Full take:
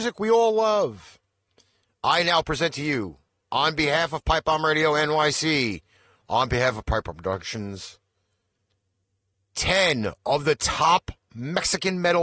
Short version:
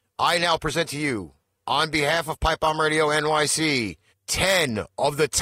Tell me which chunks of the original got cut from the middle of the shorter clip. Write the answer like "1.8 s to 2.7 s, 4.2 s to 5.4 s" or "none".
5.9 s to 9.4 s